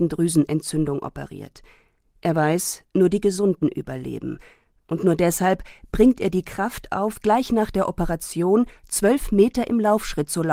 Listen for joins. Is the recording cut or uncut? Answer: uncut